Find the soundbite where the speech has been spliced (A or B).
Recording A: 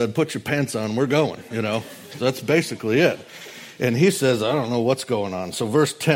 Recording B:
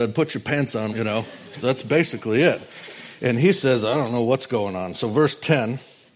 B